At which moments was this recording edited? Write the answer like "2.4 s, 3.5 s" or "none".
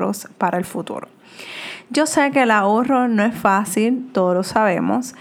none